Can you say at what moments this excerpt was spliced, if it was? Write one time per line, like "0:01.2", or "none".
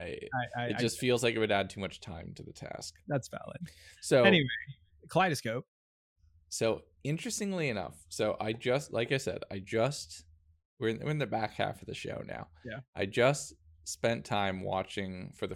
none